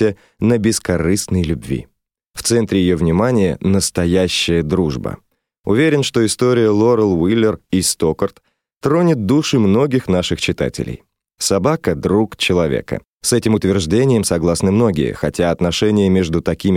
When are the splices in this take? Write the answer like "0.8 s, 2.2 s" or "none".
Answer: none